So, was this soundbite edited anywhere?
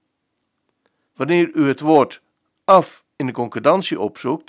yes; 2 cuts; at 1.1 s, 3.1 s

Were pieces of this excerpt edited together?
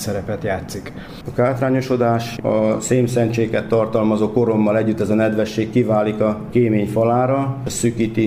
yes; 2 cuts; at 1.2 s, 2.4 s

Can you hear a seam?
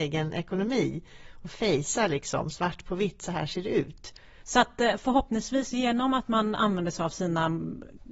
yes; 1 cut; at 4.4 s

